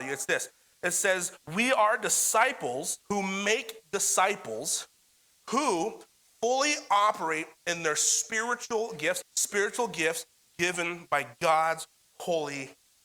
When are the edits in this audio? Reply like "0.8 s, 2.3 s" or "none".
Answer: 3.0 s, 9.2 s